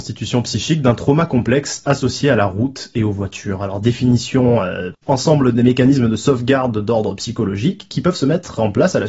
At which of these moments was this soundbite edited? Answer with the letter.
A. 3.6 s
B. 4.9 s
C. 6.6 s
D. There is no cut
B